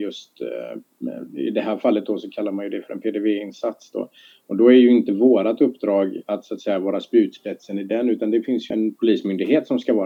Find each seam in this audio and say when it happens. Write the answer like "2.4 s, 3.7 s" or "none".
8.7 s